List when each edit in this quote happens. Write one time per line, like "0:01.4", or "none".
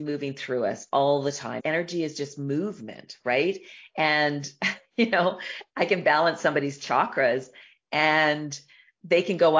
0:01.6
0:03.9